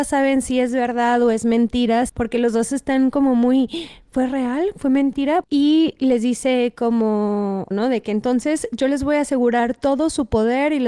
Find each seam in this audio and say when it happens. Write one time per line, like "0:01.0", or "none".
0:02.1
0:05.4
0:07.7